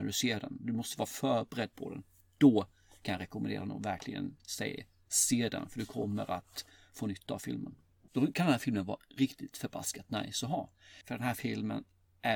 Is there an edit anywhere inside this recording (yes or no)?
yes